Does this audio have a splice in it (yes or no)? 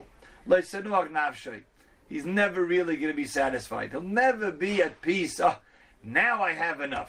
no